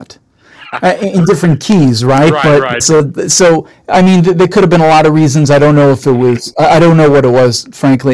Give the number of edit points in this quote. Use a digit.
1